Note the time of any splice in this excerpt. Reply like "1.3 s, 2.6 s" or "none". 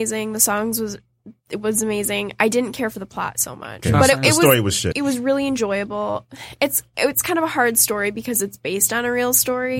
4.9 s